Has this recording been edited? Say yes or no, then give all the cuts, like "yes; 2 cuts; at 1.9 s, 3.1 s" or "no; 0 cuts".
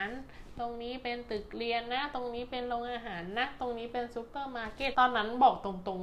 yes; 1 cut; at 4.9 s